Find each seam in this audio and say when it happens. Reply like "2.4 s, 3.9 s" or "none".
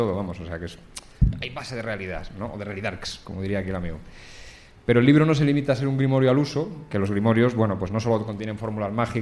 none